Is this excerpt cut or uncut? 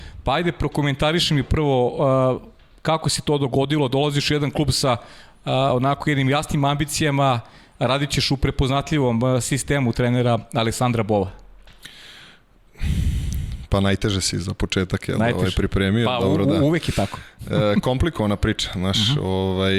uncut